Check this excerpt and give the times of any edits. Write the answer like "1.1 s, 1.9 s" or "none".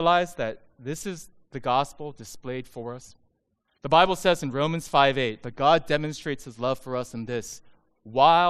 3.7 s